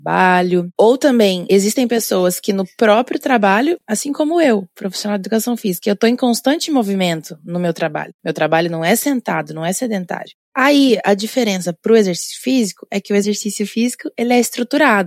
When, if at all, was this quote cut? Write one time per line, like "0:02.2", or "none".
none